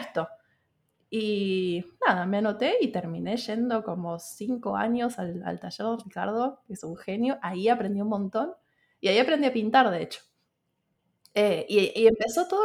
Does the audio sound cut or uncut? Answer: uncut